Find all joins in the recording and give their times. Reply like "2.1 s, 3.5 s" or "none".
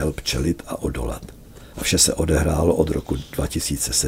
1.7 s